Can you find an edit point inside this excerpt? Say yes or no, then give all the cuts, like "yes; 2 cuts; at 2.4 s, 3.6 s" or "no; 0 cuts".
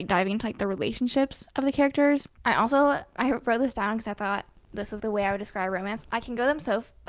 yes; 2 cuts; at 2.4 s, 5.0 s